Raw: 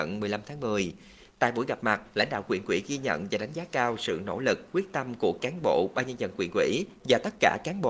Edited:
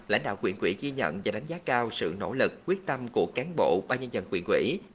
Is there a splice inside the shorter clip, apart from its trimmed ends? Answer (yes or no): no